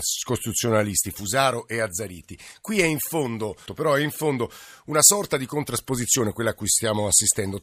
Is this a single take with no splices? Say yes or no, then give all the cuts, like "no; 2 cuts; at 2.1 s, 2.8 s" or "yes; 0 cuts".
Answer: no; 1 cut; at 3.7 s